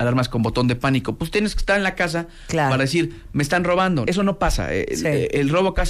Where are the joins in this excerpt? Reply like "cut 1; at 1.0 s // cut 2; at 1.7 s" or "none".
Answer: cut 1; at 4.1 s